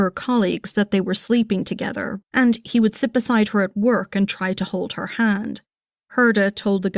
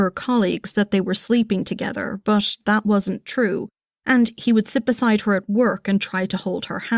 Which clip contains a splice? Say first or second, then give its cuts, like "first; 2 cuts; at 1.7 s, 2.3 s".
first; 1 cut; at 2.2 s